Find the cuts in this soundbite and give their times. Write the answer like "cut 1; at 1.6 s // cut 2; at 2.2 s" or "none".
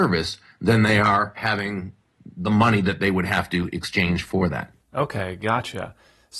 cut 1; at 4.8 s